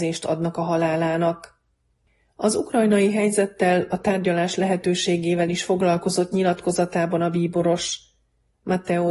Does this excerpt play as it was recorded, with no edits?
yes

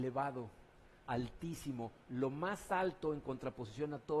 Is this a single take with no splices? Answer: no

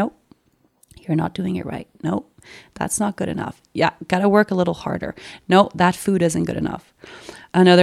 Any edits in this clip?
no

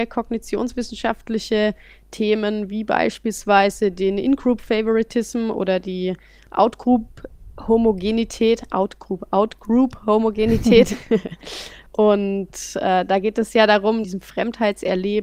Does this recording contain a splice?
yes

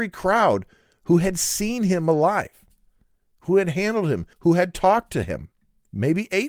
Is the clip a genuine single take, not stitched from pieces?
no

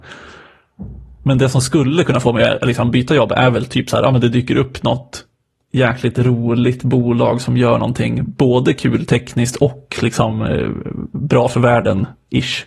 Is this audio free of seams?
yes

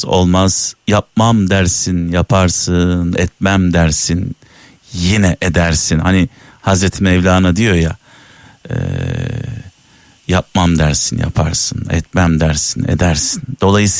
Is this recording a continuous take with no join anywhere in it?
yes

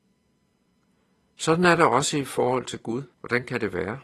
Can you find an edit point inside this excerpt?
yes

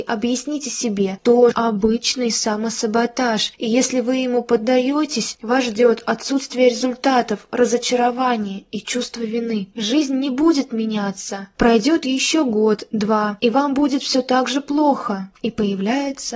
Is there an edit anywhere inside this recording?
yes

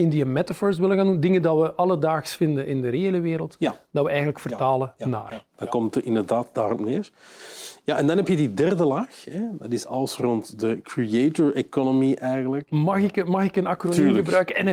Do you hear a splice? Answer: no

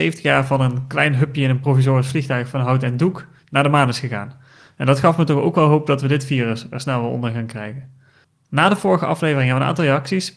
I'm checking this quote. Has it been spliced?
no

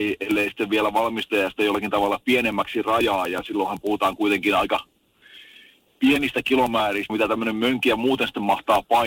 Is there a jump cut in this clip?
yes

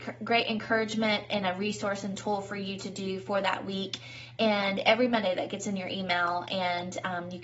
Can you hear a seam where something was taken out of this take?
no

